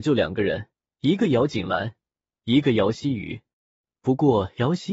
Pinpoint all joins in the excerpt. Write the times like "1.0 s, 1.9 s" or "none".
none

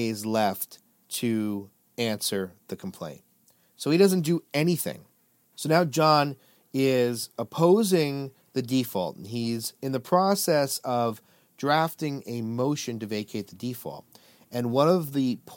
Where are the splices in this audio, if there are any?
5.5 s

